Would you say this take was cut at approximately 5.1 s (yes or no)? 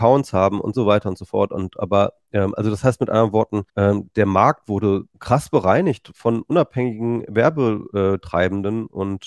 yes